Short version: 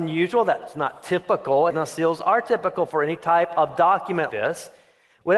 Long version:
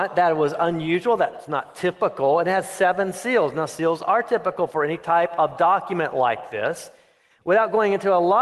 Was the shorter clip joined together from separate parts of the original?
yes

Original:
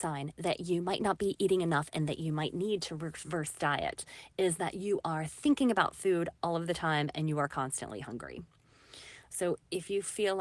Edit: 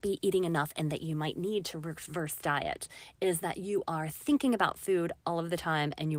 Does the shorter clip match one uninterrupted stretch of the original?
yes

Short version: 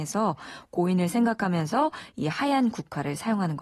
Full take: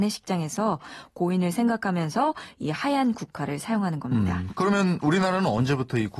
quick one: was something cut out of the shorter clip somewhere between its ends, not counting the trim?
no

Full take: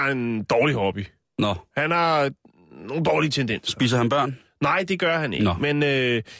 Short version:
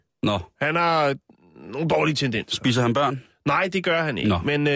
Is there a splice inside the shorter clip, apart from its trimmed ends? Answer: no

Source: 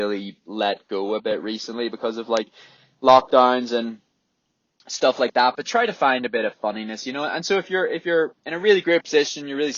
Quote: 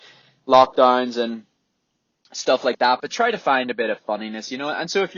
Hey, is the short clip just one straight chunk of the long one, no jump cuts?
yes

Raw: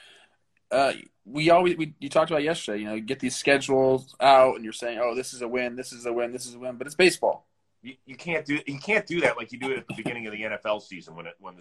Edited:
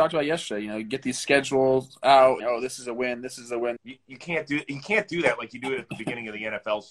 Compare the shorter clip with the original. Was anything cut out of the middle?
yes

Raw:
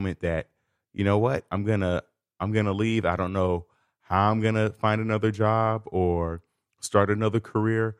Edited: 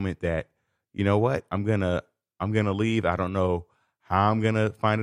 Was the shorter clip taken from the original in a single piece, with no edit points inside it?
yes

